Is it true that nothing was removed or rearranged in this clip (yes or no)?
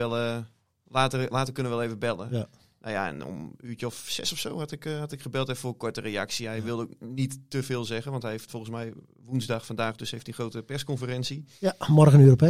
yes